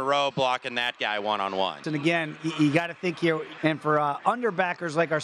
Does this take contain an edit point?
yes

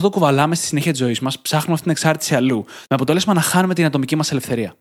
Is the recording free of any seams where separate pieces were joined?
no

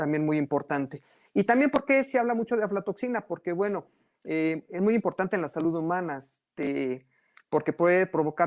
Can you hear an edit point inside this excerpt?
no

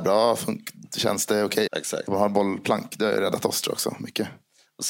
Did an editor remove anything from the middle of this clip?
yes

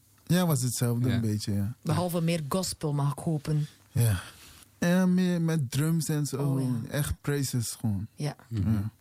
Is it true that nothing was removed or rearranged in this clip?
no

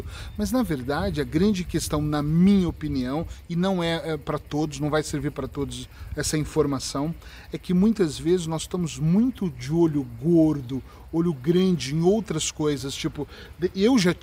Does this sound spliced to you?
no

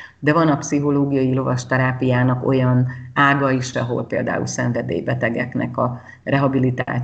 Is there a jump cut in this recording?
yes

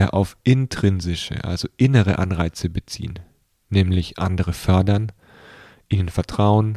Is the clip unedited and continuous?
yes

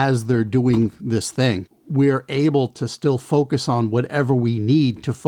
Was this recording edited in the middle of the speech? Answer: yes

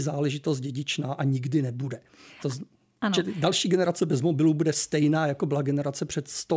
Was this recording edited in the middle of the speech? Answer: no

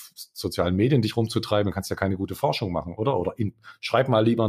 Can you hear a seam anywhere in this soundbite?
no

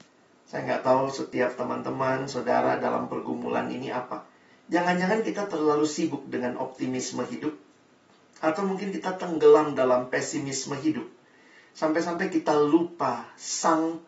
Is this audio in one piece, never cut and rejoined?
yes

